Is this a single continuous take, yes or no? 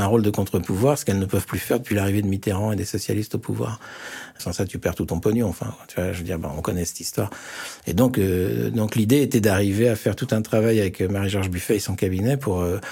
no